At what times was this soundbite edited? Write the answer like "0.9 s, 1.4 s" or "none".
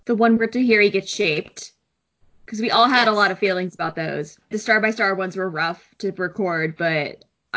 4.5 s